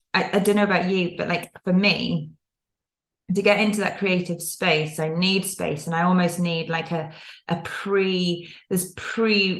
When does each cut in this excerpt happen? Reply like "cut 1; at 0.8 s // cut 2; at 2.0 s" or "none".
none